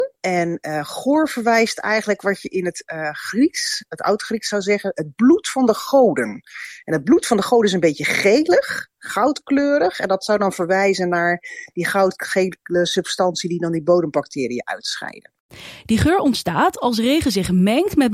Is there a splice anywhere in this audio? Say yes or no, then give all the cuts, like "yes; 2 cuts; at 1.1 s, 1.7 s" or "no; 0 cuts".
no; 0 cuts